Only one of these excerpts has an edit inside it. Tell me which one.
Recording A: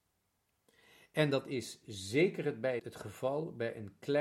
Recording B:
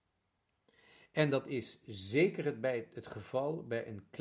A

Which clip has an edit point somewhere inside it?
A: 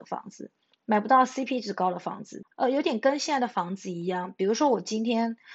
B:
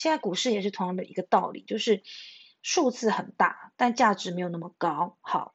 A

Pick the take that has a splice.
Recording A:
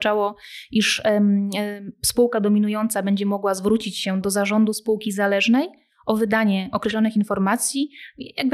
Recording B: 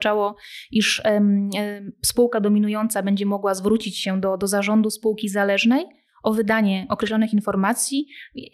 A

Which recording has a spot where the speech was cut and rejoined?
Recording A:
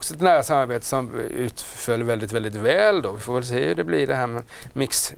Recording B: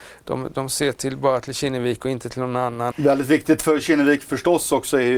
B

